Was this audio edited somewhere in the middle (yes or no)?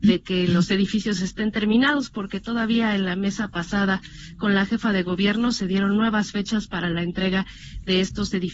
no